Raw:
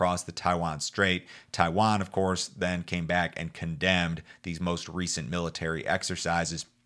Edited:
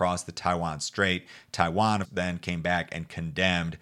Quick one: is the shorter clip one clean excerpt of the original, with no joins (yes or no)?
no